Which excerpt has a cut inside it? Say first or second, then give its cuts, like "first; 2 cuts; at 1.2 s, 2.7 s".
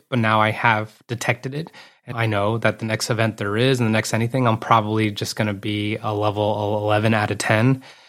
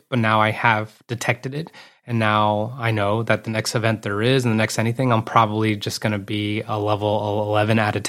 first; 1 cut; at 2.1 s